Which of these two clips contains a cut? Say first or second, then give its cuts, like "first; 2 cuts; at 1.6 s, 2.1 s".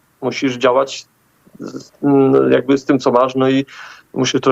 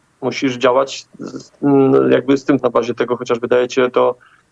second; 2 cuts; at 1.1 s, 2.6 s